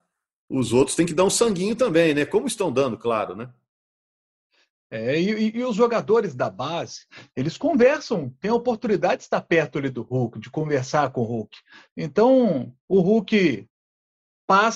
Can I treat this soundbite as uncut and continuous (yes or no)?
yes